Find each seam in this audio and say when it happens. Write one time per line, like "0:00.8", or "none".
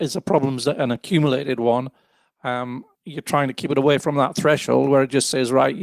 none